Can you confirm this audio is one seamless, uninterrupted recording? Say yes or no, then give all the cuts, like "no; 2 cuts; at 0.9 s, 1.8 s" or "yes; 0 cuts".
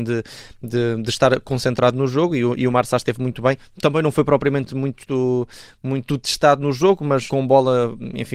no; 1 cut; at 7.3 s